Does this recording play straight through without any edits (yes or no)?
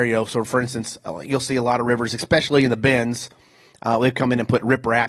yes